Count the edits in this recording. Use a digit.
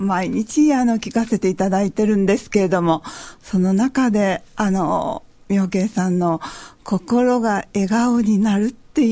0